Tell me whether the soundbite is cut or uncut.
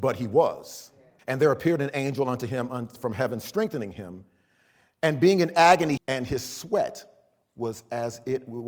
cut